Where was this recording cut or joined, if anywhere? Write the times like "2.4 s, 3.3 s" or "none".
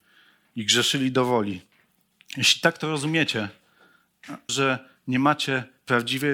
4.5 s